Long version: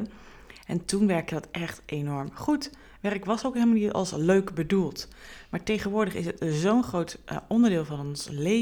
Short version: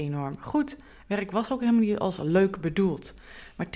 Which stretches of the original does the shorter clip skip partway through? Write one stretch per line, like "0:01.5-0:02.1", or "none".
none